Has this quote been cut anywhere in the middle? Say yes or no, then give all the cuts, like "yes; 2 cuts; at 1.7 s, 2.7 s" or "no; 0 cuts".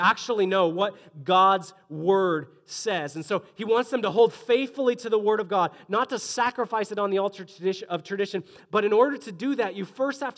no; 0 cuts